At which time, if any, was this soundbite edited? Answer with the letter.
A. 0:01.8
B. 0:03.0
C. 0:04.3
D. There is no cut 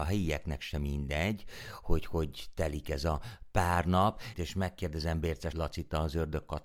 C